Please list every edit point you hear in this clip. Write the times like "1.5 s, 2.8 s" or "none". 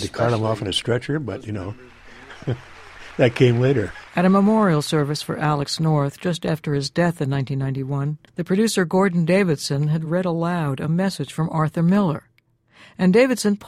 4.1 s, 8.3 s